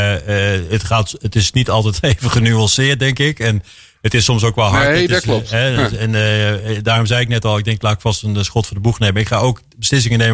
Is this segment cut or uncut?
uncut